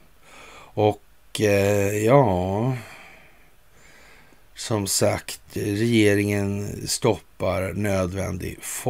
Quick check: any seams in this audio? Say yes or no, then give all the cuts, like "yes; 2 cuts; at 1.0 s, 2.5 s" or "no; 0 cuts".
no; 0 cuts